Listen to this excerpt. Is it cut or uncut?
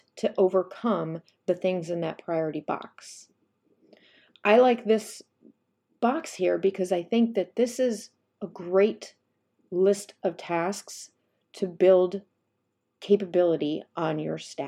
uncut